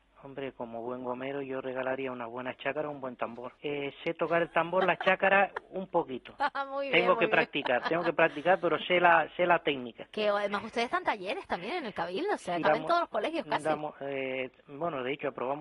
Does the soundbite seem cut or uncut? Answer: cut